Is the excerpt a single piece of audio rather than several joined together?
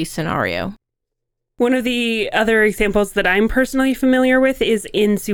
yes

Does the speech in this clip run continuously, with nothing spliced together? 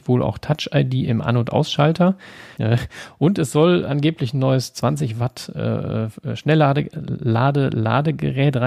no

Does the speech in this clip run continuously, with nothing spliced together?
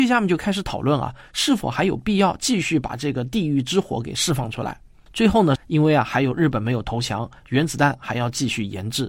no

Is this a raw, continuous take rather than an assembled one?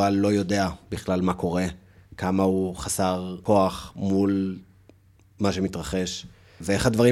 yes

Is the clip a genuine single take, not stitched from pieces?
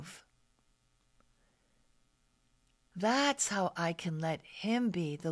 yes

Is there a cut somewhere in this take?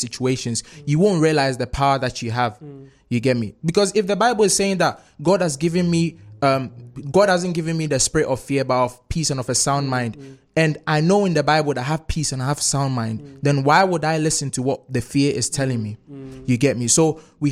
no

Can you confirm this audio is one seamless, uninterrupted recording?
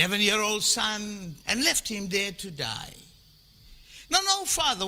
no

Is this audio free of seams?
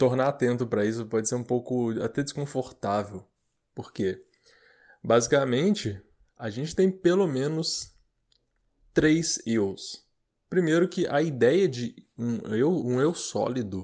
yes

